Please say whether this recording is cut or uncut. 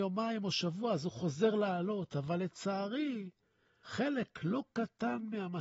uncut